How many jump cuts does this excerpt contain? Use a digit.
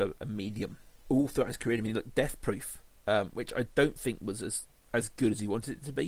0